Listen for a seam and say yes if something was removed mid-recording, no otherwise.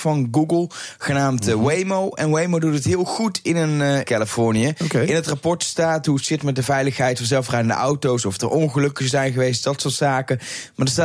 yes